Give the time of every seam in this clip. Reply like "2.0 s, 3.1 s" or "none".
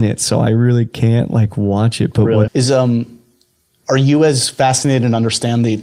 2.5 s